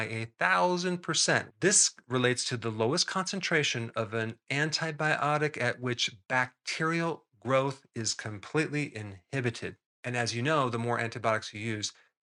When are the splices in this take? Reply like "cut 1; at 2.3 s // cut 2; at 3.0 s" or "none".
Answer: cut 1; at 1.5 s // cut 2; at 9.8 s